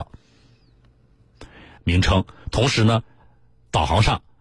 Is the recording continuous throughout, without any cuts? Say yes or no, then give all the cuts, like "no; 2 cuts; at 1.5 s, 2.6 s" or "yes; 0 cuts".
no; 1 cut; at 1.8 s